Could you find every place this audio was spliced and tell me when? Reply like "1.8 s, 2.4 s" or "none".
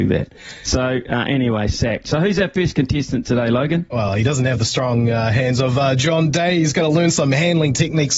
none